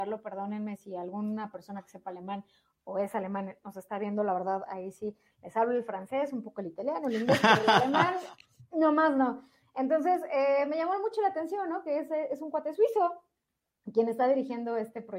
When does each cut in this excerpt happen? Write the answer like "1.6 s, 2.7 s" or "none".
none